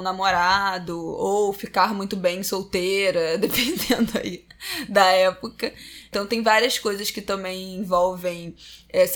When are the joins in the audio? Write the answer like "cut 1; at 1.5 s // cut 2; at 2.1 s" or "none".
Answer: none